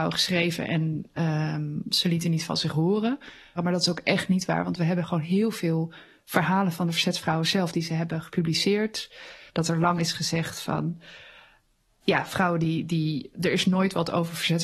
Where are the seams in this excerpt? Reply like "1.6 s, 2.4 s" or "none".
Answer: 3.6 s, 9.5 s